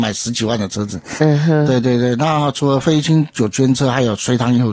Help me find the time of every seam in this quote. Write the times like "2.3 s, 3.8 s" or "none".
1.2 s